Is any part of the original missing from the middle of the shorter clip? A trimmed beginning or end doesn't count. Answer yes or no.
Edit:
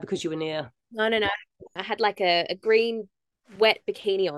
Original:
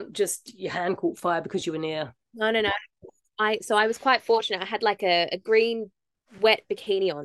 yes